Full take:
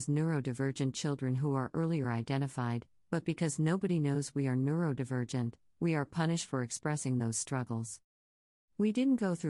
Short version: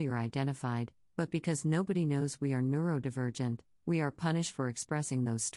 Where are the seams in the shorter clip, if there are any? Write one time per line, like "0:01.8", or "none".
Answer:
none

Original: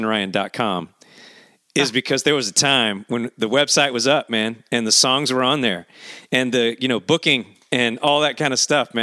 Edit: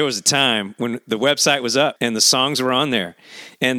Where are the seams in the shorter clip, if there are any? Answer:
0:02.0

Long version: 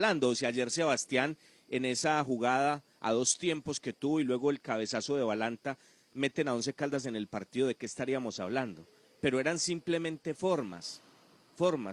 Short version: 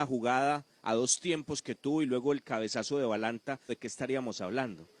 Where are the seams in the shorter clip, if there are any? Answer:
0:03.7

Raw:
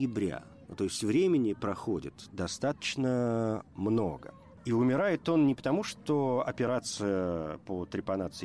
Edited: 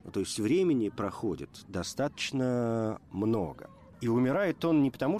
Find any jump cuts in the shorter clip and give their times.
none

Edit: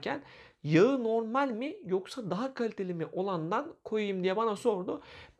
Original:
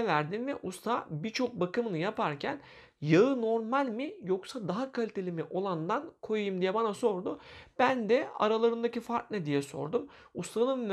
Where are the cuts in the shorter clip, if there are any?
none

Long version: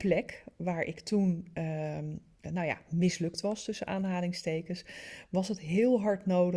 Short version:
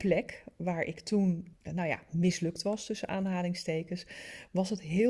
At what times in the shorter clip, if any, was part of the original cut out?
0:01.5

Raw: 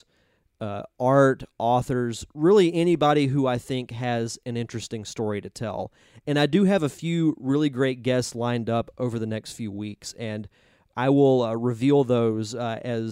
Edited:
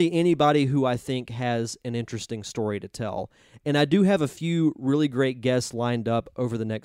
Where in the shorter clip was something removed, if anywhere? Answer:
none

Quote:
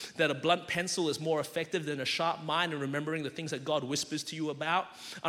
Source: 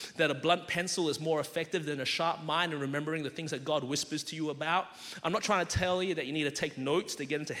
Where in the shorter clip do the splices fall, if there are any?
none

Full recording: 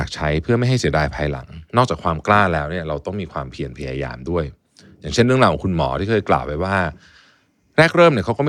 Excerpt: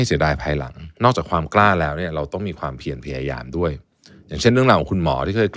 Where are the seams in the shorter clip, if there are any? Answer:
none

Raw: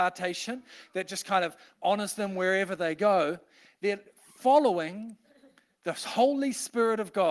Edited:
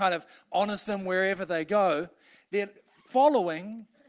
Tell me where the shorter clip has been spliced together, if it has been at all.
none

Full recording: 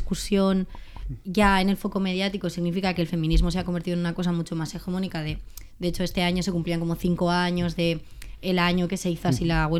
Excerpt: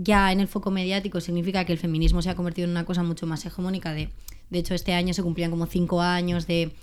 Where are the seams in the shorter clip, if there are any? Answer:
none

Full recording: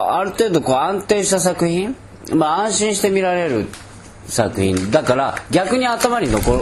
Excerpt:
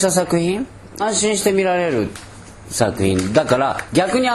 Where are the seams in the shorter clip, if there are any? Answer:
0:01.0

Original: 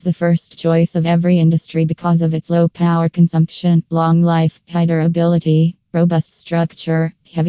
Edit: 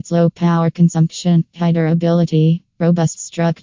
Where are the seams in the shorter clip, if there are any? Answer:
0:01.5

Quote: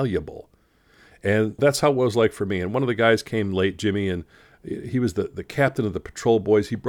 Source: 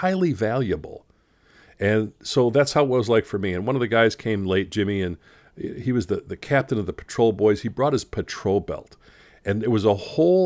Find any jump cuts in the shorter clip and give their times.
0:01.6

